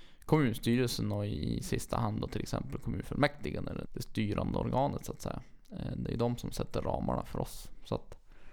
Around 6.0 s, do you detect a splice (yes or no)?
no